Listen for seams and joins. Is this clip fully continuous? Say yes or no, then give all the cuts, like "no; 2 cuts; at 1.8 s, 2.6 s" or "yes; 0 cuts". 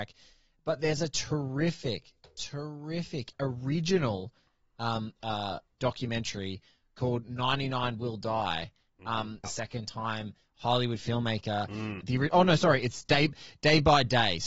no; 3 cuts; at 5.7 s, 9.4 s, 12.0 s